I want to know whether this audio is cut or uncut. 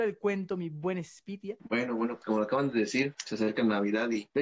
cut